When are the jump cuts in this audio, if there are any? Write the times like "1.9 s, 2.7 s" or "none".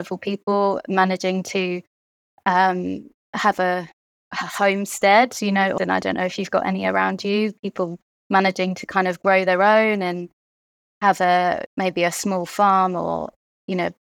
5.8 s, 11.7 s